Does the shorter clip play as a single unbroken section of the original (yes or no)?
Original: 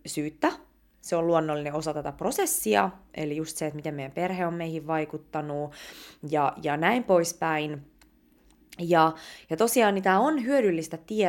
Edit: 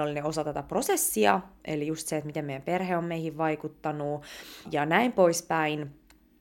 no